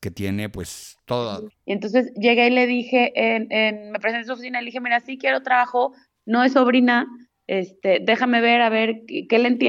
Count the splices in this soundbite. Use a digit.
1